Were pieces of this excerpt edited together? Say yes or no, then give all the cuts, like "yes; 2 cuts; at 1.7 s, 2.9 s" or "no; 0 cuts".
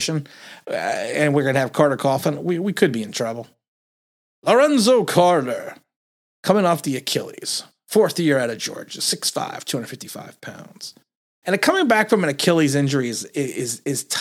yes; 1 cut; at 11.4 s